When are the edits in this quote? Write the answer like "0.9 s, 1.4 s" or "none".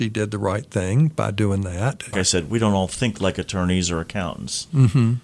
2.1 s